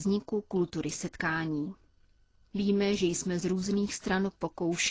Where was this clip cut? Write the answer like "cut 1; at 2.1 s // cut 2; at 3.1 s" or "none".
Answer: cut 1; at 2.5 s